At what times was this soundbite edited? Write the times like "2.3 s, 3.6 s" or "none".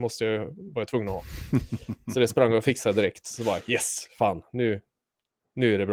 none